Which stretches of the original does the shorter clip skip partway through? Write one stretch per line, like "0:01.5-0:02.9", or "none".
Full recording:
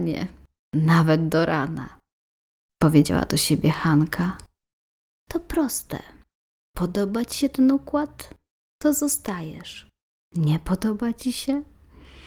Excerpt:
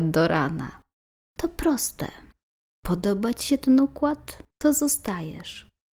0:02.4-0:05.2
0:08.4-0:08.7